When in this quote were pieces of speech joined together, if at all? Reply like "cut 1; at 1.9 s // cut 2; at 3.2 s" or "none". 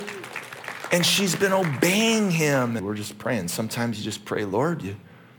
cut 1; at 2.8 s